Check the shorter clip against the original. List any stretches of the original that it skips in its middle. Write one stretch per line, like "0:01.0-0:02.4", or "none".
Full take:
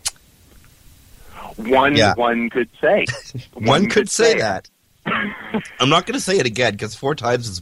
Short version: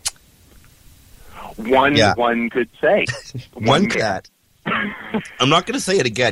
0:03.9-0:04.3